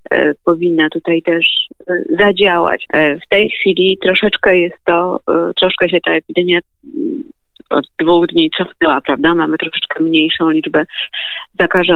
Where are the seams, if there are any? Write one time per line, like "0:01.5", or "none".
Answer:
0:02.9